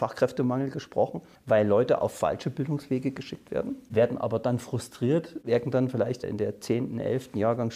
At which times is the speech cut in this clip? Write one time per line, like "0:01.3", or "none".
0:03.9

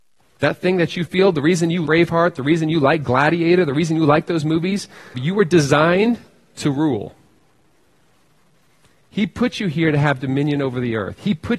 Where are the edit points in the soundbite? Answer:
0:01.9
0:05.1

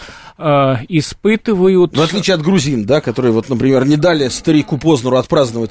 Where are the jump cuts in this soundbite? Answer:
none

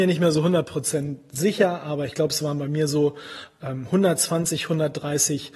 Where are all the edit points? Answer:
none

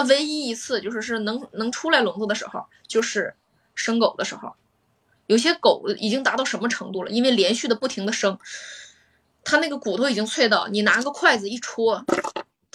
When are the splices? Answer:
none

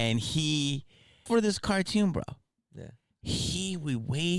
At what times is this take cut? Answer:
0:01.3

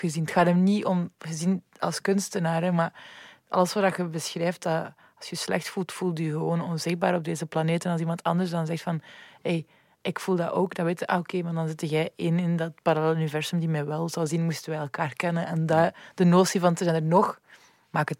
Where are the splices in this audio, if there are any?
none

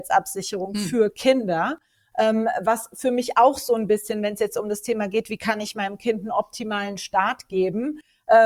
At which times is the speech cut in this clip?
none

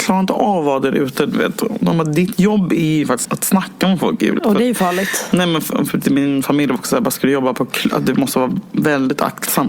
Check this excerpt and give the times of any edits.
0:03.2
0:04.4

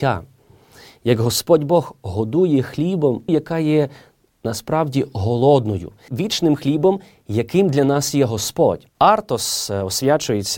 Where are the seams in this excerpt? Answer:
0:03.3
0:06.1
0:08.9

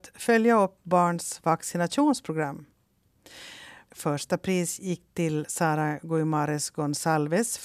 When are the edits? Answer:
0:03.9

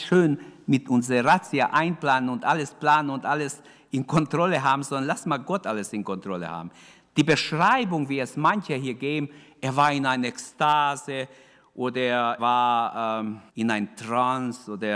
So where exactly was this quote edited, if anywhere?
0:12.4
0:13.5

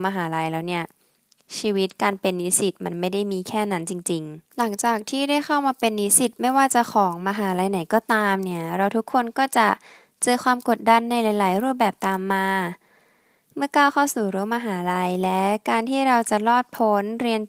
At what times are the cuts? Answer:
0:04.5

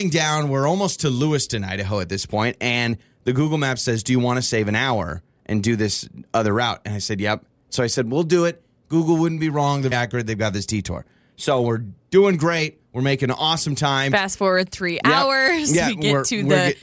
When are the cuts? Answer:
0:09.9

